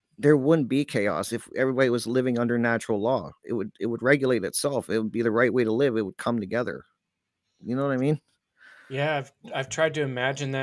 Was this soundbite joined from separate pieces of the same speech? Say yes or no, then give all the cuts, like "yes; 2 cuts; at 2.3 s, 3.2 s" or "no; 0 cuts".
no; 0 cuts